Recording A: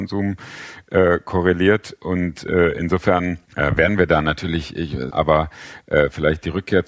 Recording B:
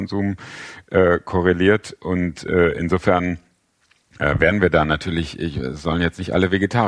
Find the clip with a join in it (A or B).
A